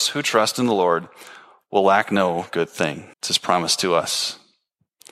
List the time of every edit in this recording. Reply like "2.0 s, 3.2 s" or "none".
3.1 s